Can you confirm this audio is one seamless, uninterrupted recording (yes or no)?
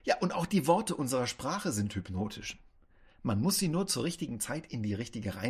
yes